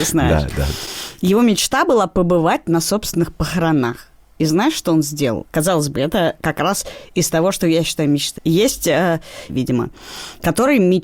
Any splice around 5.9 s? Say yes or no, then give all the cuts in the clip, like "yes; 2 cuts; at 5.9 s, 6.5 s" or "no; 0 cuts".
no; 2 cuts; at 8.4 s, 9.5 s